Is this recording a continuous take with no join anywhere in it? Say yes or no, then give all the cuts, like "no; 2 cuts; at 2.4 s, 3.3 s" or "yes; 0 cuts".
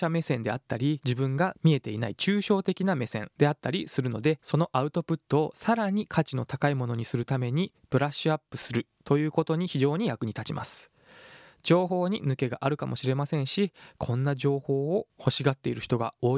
yes; 0 cuts